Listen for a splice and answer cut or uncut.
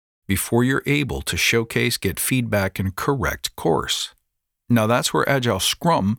uncut